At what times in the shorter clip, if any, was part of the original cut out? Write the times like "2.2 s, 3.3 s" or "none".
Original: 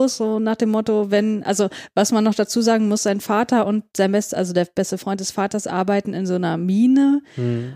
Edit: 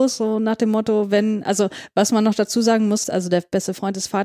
3.0 s